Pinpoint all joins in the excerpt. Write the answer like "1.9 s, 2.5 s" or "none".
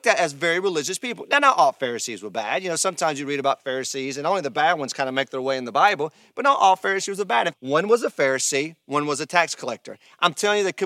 7.5 s